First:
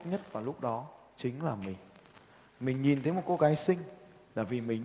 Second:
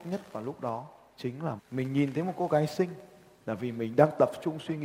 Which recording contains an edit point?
second; 1 cut; at 1.6 s

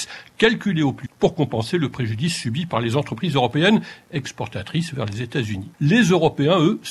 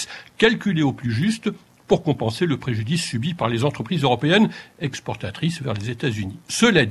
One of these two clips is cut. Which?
first; 2 cuts; at 1.1 s, 5.7 s

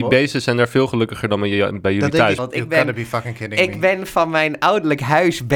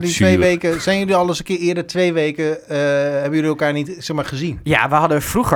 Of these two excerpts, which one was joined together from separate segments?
first; 1 cut; at 2.4 s

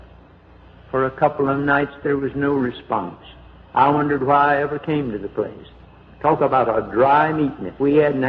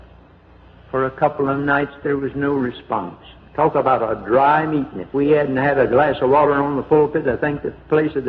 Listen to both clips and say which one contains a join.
second; 1 cut; at 3.4 s

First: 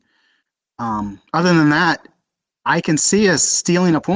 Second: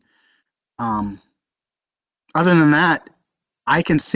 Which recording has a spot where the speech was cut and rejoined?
first; 1 cut; at 1.3 s

